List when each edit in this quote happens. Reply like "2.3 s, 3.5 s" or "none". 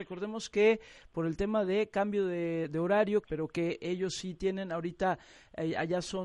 3.2 s